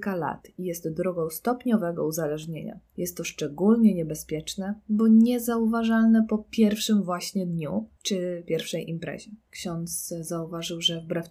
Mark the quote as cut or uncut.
uncut